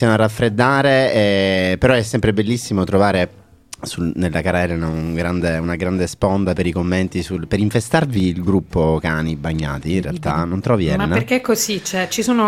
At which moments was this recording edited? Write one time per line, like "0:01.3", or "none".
none